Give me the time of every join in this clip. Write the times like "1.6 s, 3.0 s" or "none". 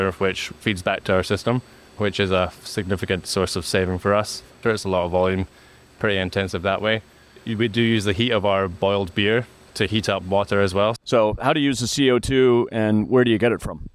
4.6 s, 11.0 s